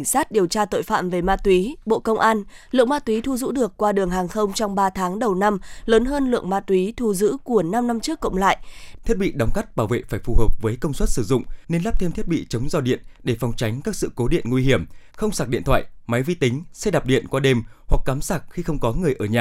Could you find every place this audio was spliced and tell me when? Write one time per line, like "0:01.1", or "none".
0:09.0
0:11.6
0:15.1